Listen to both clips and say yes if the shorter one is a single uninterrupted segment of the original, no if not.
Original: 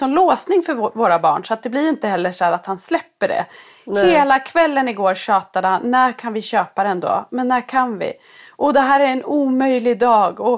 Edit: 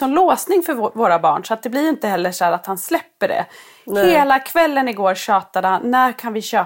yes